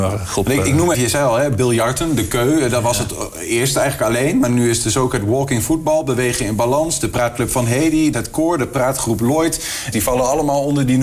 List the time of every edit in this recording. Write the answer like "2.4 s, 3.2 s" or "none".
0.9 s, 8.1 s, 9.9 s